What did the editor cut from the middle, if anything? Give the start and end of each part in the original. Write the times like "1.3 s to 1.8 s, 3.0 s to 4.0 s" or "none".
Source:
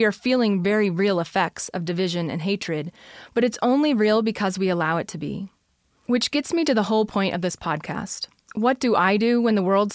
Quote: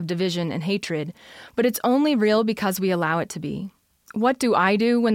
5.8 s to 8.4 s